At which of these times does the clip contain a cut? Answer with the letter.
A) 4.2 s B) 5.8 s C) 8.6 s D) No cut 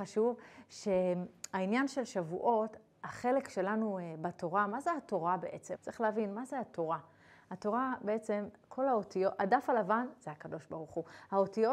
B